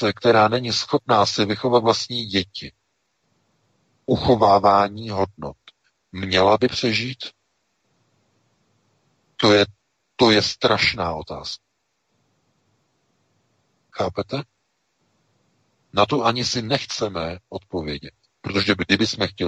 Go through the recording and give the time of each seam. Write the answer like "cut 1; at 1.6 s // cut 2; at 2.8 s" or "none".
none